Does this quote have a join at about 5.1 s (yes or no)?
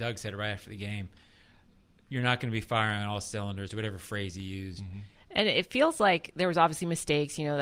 yes